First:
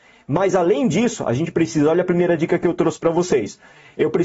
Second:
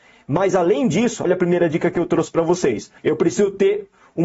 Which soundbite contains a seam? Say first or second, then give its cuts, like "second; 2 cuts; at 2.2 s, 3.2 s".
second; 2 cuts; at 1.2 s, 3.0 s